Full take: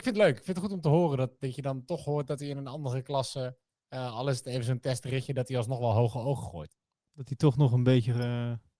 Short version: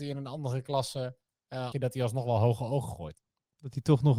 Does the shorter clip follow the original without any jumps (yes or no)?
no